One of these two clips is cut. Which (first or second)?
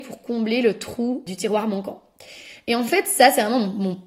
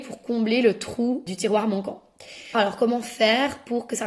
second